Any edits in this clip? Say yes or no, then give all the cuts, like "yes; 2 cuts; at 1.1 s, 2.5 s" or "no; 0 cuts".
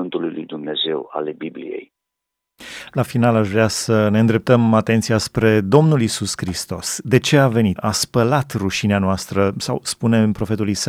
yes; 1 cut; at 7.8 s